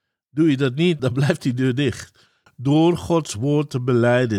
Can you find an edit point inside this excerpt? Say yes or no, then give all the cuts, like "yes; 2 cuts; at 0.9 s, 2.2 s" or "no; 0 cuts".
yes; 2 cuts; at 1.0 s, 2.5 s